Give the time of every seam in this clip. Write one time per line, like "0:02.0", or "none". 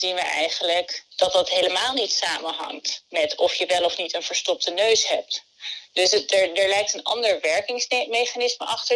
none